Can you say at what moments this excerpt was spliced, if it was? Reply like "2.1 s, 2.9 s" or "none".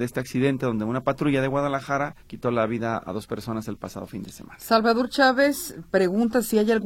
2.2 s